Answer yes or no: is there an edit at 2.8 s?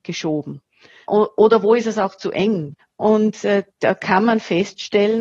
yes